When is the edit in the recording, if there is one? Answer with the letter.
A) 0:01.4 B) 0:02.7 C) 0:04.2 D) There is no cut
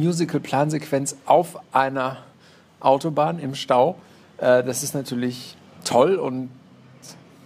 D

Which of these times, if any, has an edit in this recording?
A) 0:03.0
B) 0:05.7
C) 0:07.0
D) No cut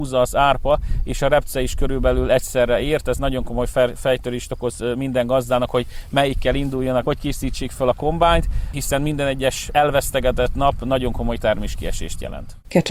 C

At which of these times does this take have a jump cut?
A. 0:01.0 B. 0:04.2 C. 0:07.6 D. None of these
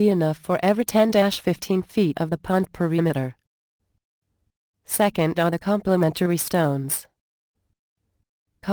D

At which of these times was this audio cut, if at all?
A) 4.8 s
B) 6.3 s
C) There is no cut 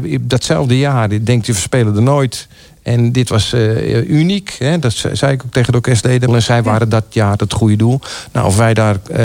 B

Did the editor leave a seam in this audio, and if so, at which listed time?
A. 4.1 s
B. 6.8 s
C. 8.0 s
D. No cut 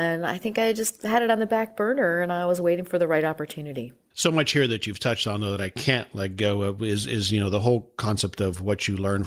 A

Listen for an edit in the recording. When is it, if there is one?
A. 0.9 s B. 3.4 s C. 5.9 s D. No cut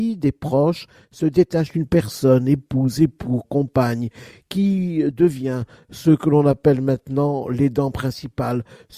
B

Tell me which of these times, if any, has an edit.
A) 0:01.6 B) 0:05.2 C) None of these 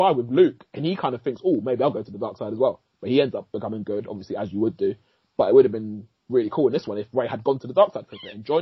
C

